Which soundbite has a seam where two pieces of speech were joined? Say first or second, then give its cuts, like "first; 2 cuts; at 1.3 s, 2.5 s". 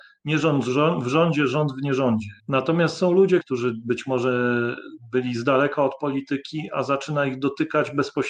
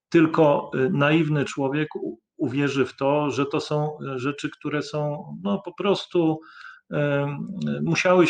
first; 2 cuts; at 2.4 s, 3.4 s